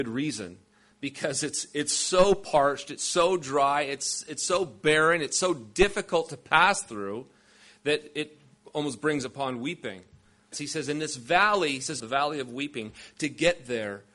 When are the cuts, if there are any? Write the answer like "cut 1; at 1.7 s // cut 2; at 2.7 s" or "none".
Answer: cut 1; at 10.5 s // cut 2; at 12.0 s

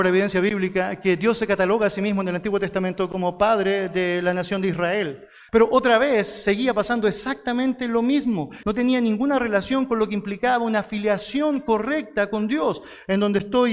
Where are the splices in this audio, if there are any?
cut 1; at 5.5 s // cut 2; at 8.6 s

